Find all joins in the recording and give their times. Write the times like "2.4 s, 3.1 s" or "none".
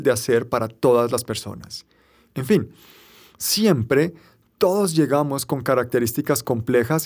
2.3 s